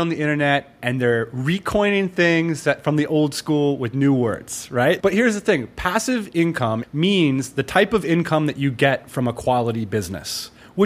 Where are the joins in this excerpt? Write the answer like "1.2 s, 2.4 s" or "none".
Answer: 5.0 s, 6.8 s